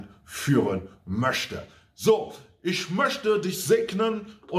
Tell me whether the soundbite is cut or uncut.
uncut